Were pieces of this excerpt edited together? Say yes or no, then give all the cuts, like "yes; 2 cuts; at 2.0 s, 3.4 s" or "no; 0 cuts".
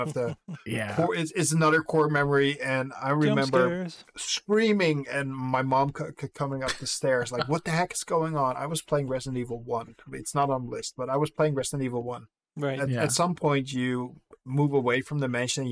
no; 0 cuts